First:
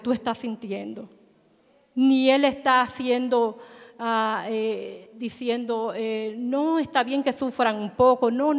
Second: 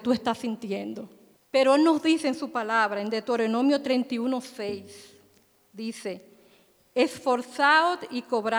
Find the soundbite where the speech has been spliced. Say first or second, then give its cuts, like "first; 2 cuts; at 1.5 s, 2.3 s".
second; 1 cut; at 1.4 s